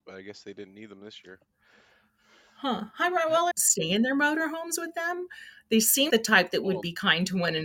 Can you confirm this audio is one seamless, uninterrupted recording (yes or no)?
no